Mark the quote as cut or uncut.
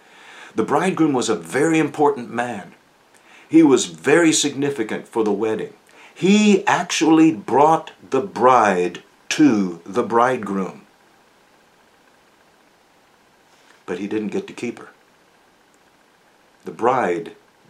uncut